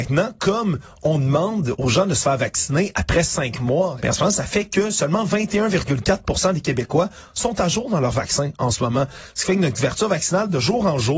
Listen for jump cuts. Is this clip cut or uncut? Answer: cut